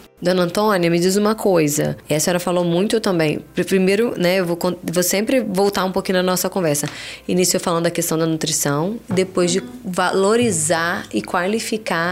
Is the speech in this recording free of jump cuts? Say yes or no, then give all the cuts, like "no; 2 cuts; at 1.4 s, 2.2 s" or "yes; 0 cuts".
yes; 0 cuts